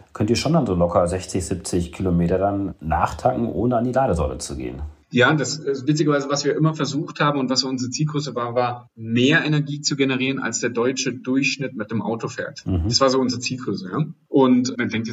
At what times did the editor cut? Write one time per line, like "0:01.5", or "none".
none